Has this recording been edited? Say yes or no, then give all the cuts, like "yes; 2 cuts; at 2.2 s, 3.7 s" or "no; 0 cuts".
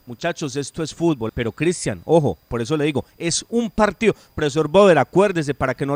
yes; 1 cut; at 1.3 s